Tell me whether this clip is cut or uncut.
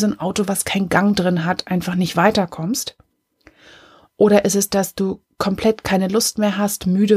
uncut